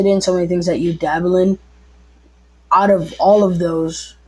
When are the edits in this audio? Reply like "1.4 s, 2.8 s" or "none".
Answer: none

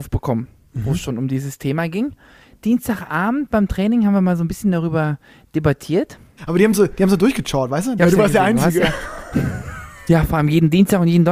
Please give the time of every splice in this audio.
6.4 s, 8.0 s, 10.1 s

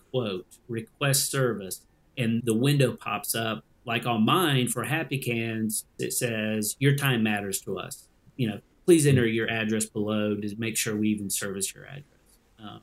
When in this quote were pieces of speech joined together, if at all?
2.4 s, 6.0 s

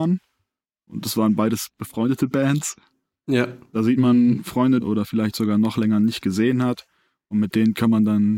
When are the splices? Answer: 3.7 s, 4.8 s

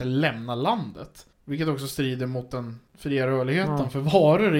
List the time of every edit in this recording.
1.3 s, 2.9 s

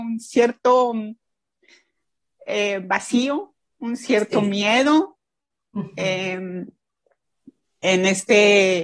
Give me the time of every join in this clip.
none

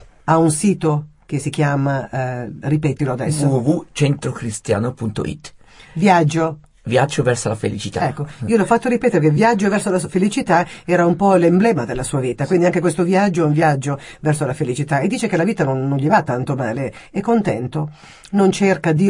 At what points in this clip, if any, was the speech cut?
none

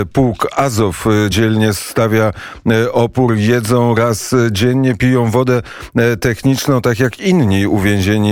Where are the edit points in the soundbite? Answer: none

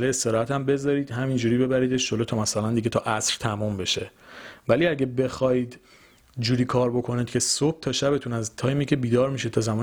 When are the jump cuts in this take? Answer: none

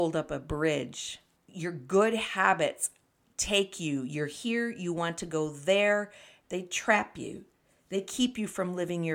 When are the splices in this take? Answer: 1.4 s, 6.4 s

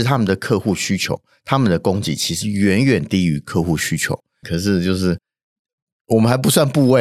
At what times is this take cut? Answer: 4.4 s

